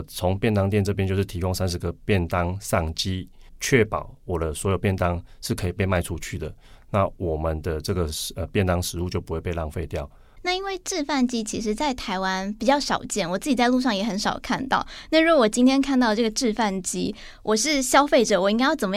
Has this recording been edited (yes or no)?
no